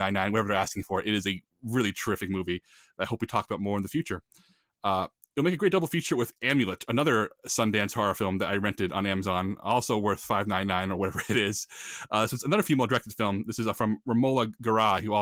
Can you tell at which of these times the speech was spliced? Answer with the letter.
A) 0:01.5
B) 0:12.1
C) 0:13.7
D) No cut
D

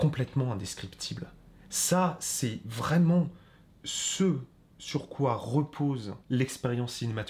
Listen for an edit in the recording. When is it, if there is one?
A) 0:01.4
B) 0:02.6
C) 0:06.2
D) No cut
C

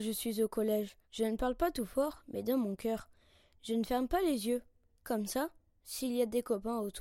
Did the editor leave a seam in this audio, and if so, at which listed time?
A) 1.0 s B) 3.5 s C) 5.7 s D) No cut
A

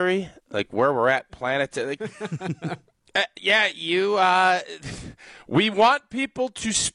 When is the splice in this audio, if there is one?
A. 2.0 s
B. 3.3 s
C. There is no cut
A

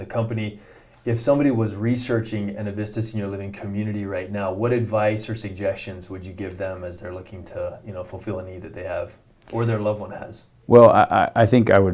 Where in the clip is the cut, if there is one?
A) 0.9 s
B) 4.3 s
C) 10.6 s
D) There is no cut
D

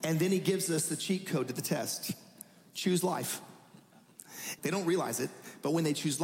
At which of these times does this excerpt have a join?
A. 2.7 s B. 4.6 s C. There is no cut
B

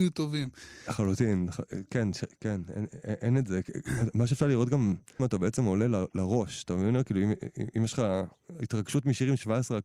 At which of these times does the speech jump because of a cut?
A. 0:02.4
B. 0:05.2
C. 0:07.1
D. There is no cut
B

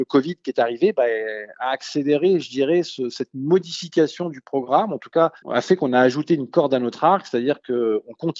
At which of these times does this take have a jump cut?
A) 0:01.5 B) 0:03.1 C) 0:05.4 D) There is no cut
C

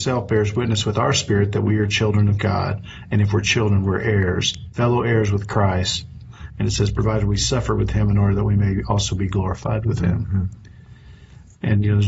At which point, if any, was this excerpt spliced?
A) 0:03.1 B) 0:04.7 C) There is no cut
B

